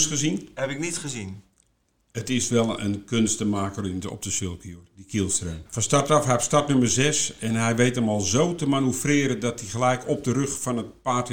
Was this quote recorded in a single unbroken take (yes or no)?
no